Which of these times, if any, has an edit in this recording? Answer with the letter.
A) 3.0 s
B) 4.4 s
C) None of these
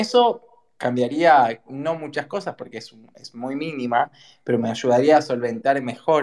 C